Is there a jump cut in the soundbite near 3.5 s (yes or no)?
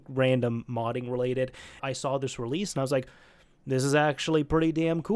no